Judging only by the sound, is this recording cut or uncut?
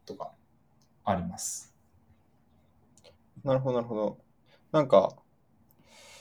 uncut